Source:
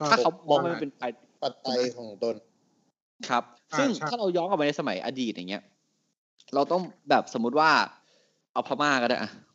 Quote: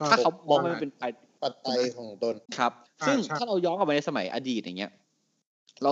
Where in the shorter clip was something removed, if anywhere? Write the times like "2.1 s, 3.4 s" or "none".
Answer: 2.5 s